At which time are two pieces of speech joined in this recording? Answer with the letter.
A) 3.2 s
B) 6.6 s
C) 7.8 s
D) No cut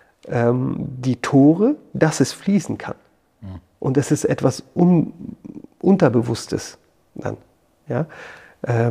D